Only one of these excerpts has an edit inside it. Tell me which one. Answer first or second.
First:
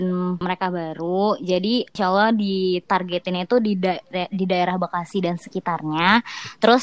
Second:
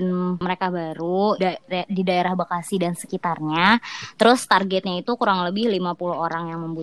second